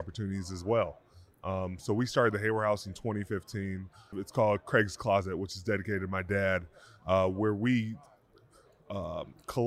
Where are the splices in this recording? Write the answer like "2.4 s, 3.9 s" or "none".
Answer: 4.1 s